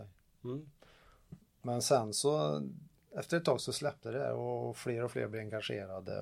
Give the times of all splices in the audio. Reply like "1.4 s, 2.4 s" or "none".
1.4 s